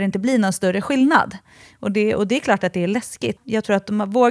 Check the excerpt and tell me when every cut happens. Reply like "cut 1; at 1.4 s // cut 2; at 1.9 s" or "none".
cut 1; at 3.4 s